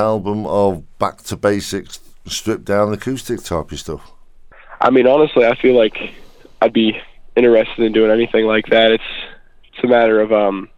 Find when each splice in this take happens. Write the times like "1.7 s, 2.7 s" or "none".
none

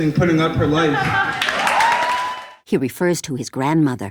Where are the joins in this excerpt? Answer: none

